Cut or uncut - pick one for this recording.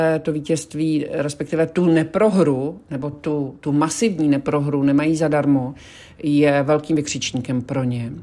uncut